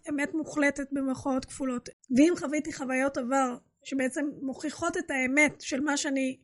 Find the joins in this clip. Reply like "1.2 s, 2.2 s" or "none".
2.0 s